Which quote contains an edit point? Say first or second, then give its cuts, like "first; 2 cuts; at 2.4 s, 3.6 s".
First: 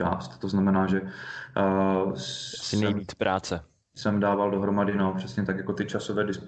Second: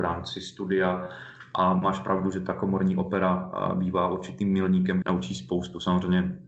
second; 1 cut; at 5.0 s